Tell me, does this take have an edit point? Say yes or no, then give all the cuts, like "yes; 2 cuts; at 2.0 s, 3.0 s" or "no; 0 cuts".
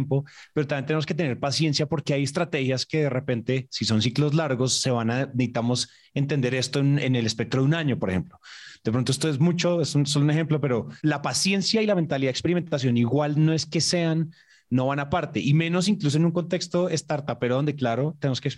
no; 0 cuts